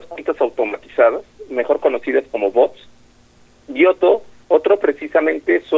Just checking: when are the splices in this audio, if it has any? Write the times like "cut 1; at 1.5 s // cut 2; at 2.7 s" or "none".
none